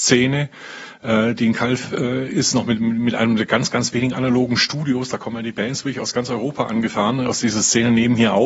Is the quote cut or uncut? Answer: uncut